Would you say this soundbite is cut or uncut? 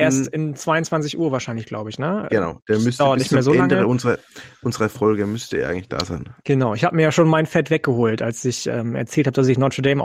uncut